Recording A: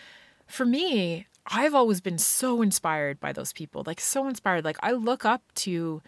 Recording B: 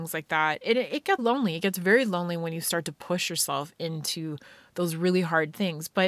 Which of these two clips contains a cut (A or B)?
B